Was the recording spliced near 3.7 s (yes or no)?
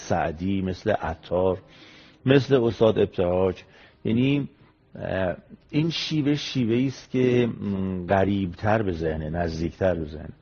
no